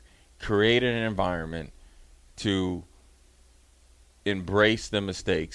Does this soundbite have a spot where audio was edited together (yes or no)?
no